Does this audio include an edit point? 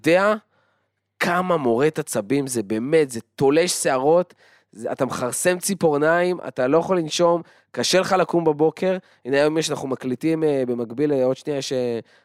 no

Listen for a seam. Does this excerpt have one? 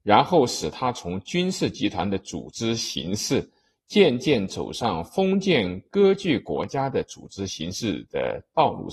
no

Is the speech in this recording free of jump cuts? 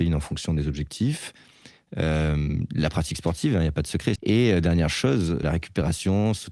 no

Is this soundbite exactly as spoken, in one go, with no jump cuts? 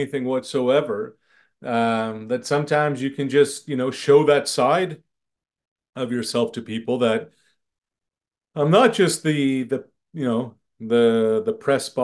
yes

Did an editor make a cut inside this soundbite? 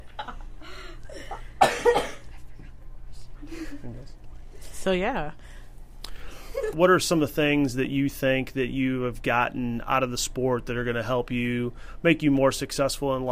yes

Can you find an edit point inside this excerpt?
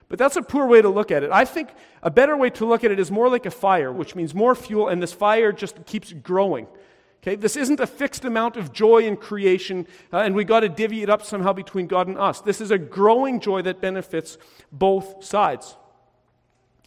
yes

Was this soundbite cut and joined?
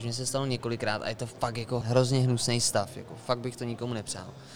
yes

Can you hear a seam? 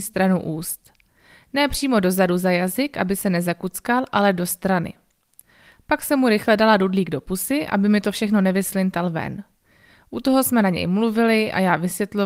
no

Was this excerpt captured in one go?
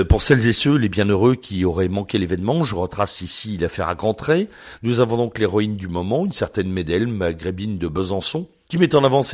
yes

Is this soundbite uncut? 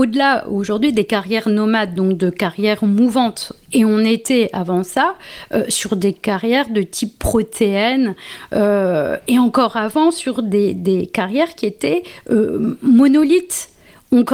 yes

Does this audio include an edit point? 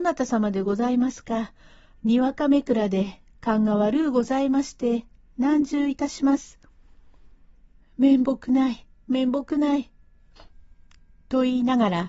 yes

